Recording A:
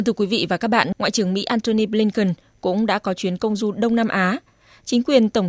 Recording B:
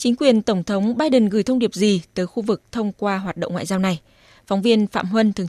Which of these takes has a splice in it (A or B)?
A